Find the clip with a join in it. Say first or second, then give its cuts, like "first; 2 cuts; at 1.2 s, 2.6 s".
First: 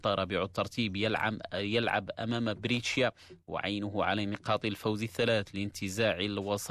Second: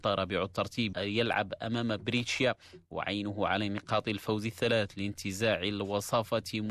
second; 1 cut; at 0.9 s